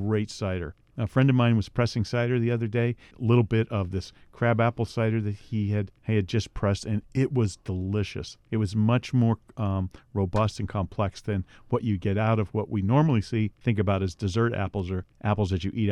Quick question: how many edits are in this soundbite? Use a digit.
1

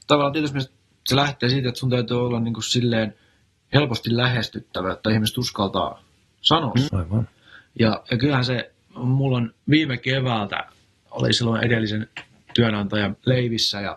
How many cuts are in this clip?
2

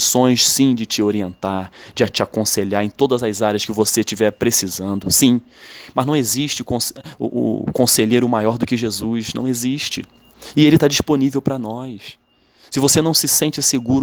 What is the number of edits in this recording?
0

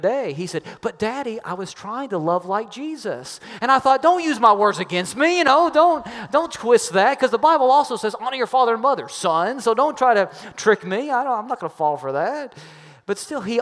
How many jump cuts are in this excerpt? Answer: 0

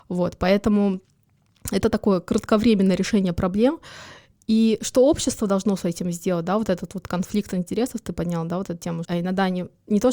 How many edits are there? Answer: 1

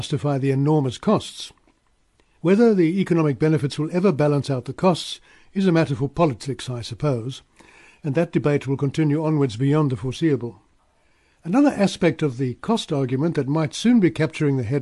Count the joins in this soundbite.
0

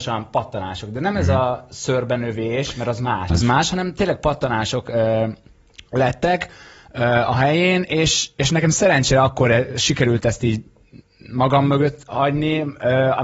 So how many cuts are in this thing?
1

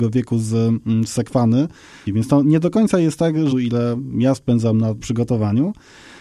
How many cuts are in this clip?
3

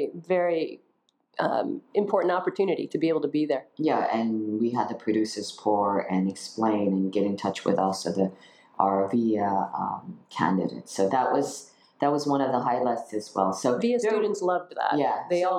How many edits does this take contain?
0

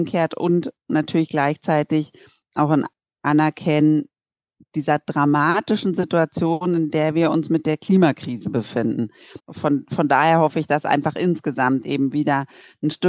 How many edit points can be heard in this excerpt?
1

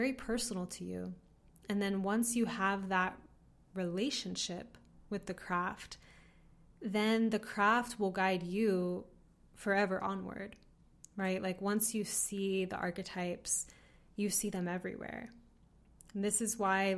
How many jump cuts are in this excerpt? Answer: 0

